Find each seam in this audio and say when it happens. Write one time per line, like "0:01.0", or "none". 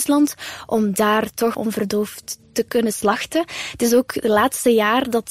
none